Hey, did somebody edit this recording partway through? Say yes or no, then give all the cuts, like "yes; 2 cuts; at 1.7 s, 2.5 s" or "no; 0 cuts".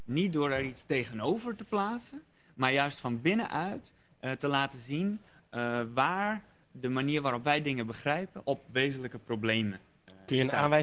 no; 0 cuts